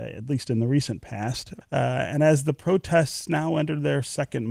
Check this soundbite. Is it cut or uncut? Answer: cut